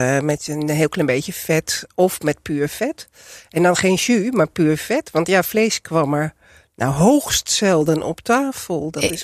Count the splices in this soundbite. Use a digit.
0